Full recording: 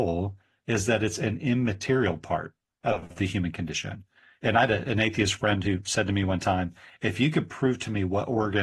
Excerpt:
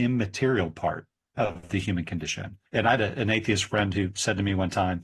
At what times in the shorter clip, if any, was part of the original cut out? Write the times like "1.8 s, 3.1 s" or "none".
2.7 s